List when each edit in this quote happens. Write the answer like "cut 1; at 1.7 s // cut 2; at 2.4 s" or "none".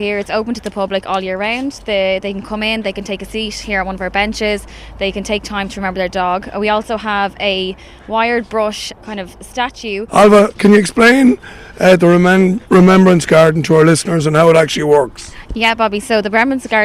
cut 1; at 9.0 s // cut 2; at 10.1 s